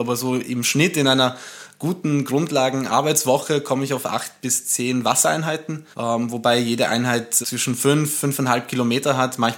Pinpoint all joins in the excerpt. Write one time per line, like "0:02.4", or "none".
0:05.9
0:07.4